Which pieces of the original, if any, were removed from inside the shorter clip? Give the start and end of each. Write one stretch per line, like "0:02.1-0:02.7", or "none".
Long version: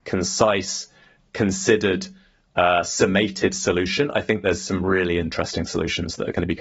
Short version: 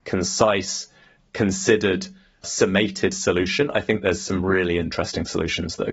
0:02.4-0:02.8